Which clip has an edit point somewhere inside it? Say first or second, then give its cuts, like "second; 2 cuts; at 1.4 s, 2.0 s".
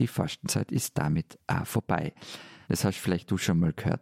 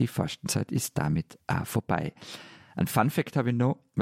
first; 1 cut; at 2.6 s